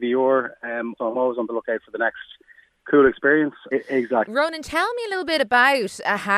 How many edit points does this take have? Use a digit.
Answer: 2